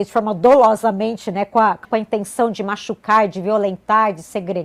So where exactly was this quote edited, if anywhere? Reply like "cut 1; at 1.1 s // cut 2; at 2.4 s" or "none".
cut 1; at 1.8 s